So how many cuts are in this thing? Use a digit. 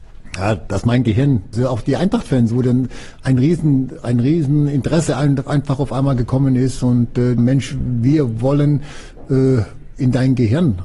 2